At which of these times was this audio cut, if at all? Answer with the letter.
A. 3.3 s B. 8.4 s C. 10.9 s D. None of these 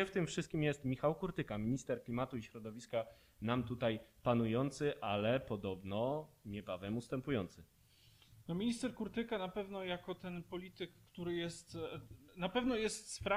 D